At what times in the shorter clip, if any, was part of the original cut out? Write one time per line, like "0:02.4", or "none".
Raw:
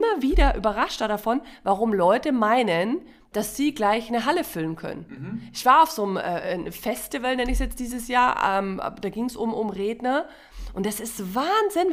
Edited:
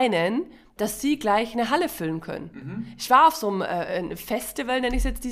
none